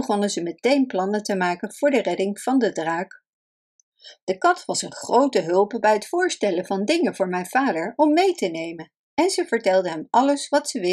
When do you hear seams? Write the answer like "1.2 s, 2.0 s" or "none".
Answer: none